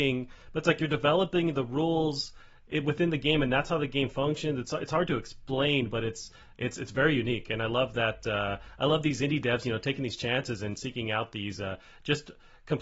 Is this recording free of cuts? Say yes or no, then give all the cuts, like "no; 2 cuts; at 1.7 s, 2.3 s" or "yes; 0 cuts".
yes; 0 cuts